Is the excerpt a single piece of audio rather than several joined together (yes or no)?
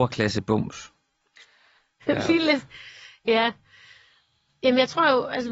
no